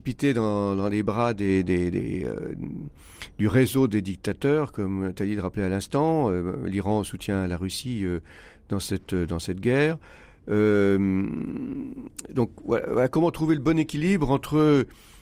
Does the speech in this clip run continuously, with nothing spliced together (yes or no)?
yes